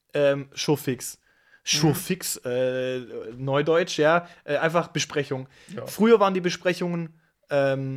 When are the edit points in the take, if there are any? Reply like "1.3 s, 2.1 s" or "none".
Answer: none